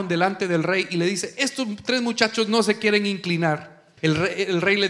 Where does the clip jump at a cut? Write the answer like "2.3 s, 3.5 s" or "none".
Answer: 4.0 s